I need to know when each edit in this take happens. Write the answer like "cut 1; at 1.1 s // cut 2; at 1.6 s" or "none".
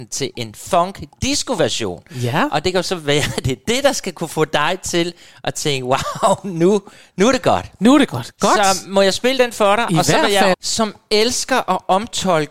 cut 1; at 10.5 s